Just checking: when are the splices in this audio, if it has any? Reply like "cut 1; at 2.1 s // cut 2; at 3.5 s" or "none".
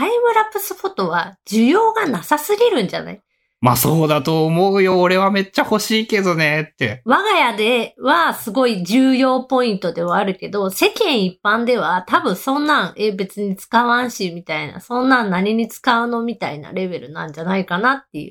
none